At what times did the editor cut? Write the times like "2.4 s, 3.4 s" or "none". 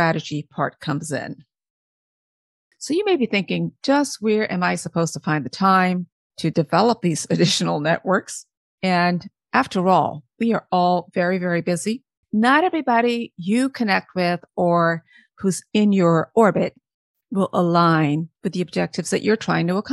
12.2 s, 18.4 s